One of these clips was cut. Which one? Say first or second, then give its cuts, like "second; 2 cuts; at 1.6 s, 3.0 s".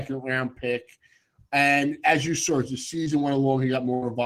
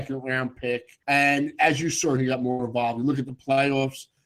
second; 2 cuts; at 1.0 s, 2.2 s